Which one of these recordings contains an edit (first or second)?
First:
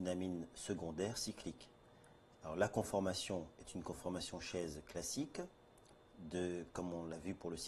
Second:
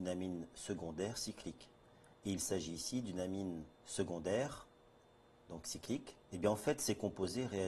second